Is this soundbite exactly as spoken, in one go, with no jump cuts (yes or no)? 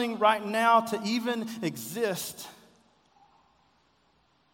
yes